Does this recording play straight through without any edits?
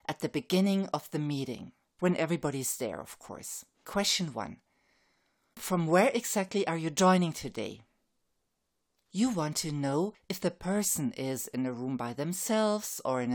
yes; 0 cuts

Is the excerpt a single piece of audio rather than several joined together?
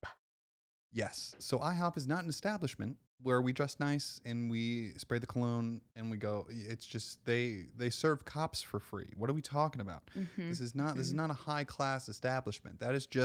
yes; 0 cuts

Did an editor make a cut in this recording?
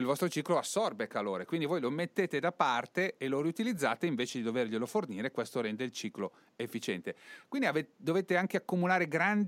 no; 0 cuts

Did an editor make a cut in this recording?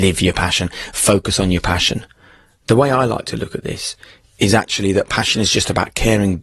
no; 0 cuts

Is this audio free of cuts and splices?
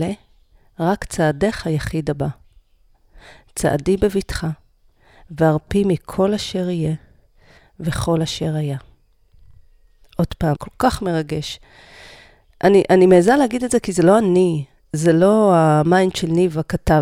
no; 1 cut; at 10.5 s

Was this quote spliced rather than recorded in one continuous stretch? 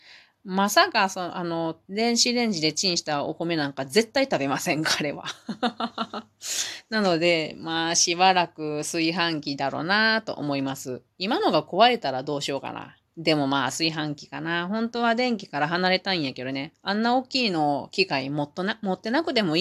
yes; 2 cuts; at 1.9 s, 13.1 s

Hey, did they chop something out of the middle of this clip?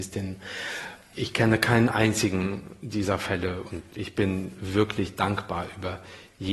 yes; 1 cut; at 3.9 s

